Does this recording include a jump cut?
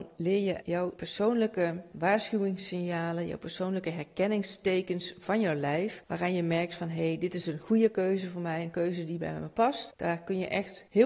yes; 1 cut; at 9.9 s

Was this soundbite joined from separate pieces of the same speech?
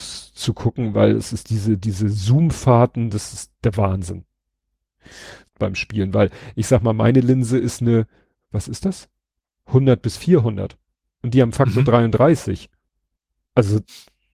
yes; 2 cuts; at 5.5 s, 11.1 s

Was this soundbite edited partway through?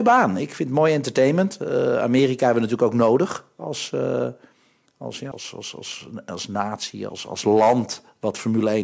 yes; 2 cuts; at 5.3 s, 7.1 s

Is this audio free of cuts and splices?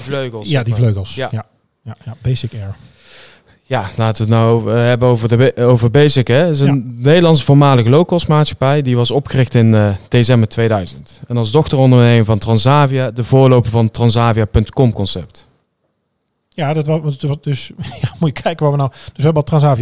yes; 0 cuts

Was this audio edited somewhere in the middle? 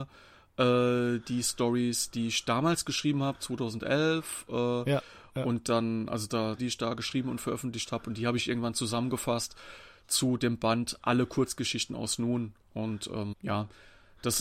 yes; 2 cuts; at 6.6 s, 13.3 s

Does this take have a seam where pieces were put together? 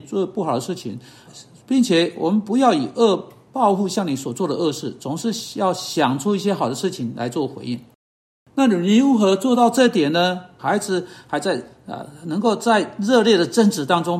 yes; 2 cuts; at 1.3 s, 10.6 s

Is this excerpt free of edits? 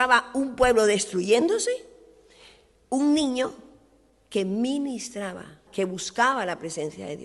no; 1 cut; at 5.7 s

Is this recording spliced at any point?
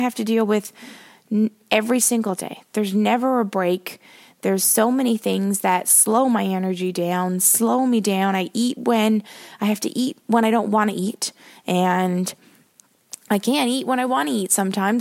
no; 0 cuts

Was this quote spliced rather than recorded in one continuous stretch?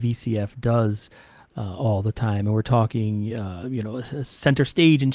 no; 0 cuts

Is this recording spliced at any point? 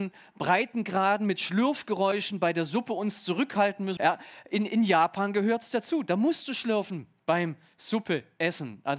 yes; 1 cut; at 4.0 s

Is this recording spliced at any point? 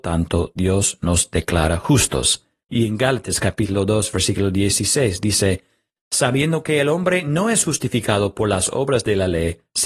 yes; 2 cuts; at 2.6 s, 6.0 s

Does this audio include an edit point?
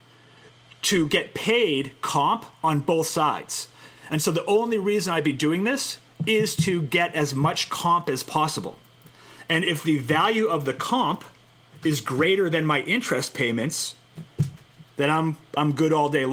no; 0 cuts

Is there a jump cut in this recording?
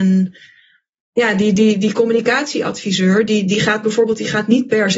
no; 0 cuts

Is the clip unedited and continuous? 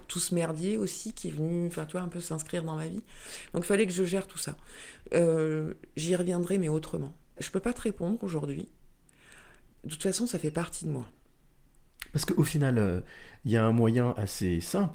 no; 1 cut; at 7.4 s

